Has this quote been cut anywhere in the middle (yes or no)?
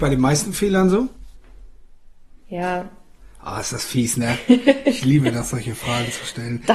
no